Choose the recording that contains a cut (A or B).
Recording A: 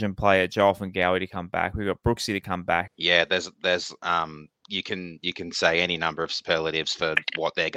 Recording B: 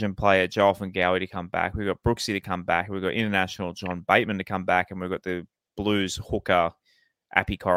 A